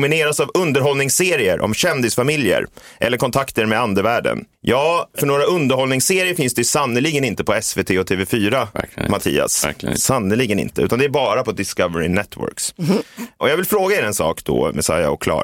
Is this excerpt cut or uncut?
uncut